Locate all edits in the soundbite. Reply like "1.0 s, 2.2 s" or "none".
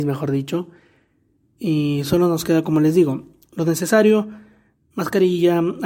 none